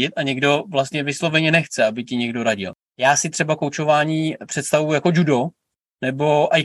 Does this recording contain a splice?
yes; 1 cut; at 2.9 s

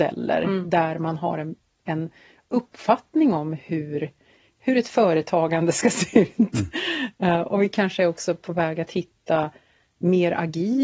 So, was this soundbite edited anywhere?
no; 0 cuts

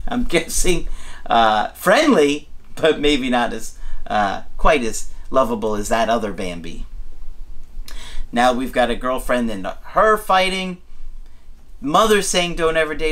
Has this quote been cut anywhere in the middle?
yes; 1 cut; at 8.2 s

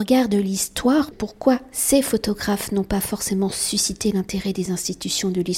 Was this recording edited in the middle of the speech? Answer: no; 0 cuts

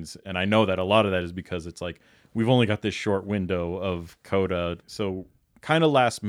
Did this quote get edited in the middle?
yes; 1 cut; at 4.8 s

